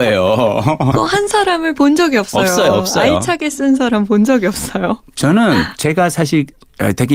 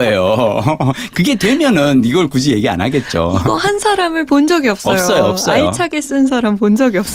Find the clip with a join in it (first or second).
first